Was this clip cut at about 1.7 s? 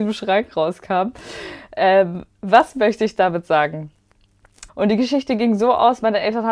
no; 1 cut; at 4.7 s

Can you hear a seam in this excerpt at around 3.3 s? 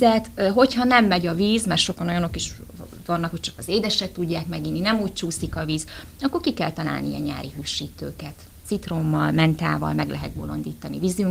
yes; 1 cut; at 3.3 s

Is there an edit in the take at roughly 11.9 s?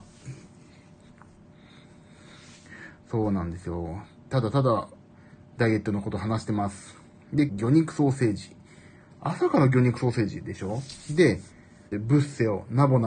yes; 2 cuts; at 7.5 s, 11.9 s

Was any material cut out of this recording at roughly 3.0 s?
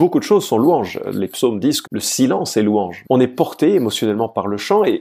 yes; 2 cuts; at 1.8 s, 3.0 s

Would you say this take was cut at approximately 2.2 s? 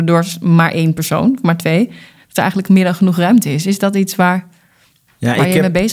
yes; 1 cut; at 2.2 s

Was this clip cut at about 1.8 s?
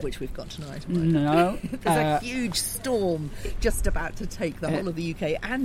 no; 0 cuts

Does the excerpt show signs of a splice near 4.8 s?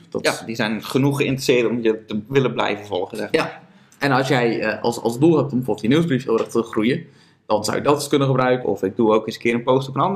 no; 1 cut; at 8.6 s

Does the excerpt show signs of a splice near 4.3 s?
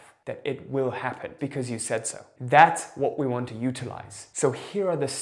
no; 1 cut; at 1.4 s

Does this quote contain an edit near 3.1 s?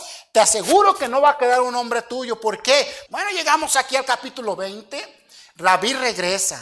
yes; 1 cut; at 3.1 s

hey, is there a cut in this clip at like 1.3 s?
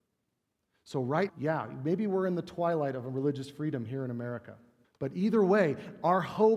yes; 2 cuts; at 1.3 s, 4.8 s

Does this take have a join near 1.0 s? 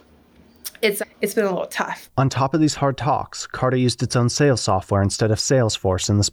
yes; 1 cut; at 1.0 s

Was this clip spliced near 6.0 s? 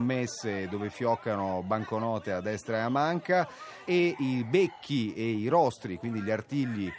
no; 1 cut; at 3.8 s

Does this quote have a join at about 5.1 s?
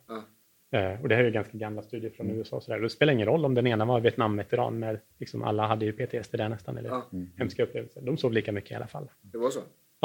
yes; 1 cut; at 5.1 s

